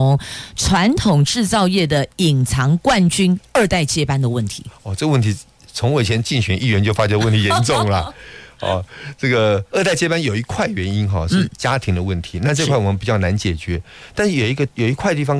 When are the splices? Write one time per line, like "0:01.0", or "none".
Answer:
none